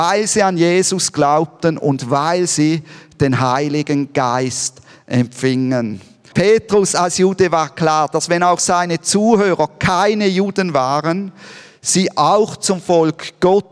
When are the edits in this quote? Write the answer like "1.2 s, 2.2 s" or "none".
6.3 s